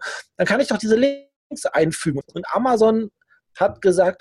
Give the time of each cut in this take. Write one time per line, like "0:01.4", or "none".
0:02.2